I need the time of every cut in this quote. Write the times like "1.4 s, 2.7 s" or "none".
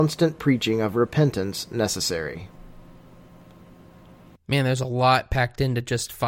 4.4 s